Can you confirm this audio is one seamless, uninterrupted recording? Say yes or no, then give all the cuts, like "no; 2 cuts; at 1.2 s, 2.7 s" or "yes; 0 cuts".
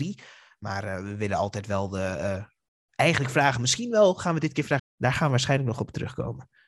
no; 1 cut; at 4.8 s